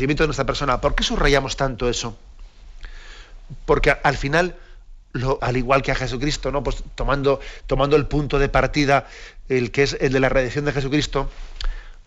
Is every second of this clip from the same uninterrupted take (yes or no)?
no